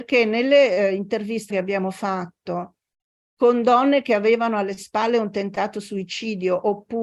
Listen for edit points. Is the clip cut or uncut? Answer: cut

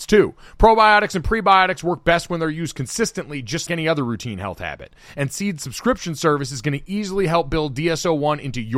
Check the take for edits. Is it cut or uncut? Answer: cut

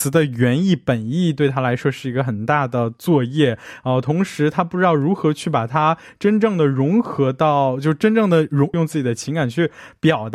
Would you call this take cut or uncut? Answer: cut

